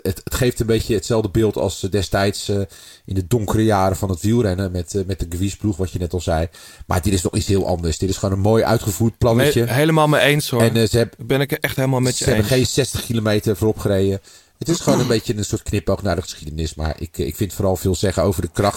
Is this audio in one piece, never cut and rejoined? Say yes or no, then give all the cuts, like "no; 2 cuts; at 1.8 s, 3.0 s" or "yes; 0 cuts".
yes; 0 cuts